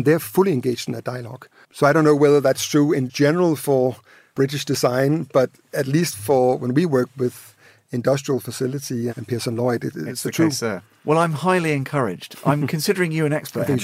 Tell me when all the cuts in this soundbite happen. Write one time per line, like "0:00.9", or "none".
0:09.1